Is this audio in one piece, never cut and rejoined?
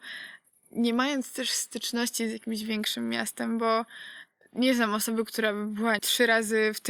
no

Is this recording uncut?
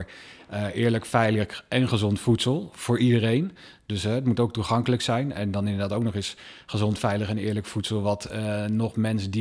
yes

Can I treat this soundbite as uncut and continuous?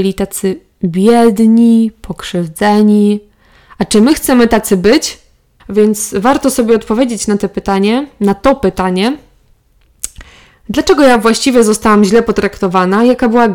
no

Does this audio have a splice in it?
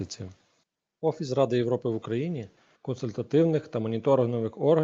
yes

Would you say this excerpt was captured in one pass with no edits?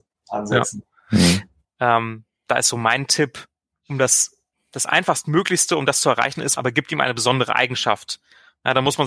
no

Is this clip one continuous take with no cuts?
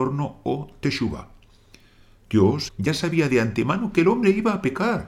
no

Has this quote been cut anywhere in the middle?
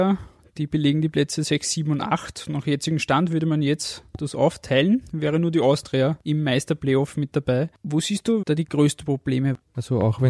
yes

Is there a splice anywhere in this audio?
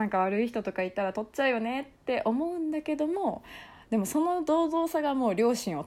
no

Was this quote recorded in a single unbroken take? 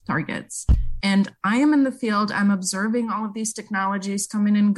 no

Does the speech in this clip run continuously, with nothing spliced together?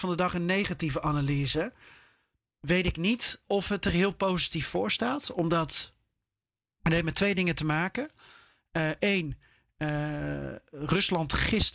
no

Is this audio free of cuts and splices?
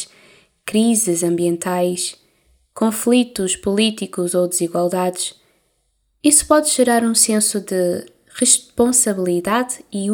yes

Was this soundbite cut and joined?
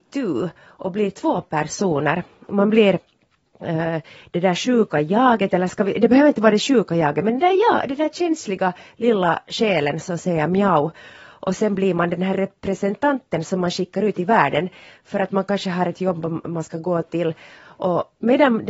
no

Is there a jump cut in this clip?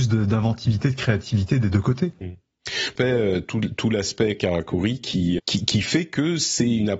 yes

